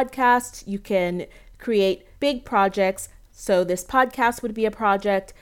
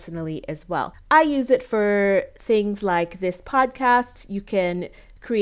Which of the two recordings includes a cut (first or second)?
first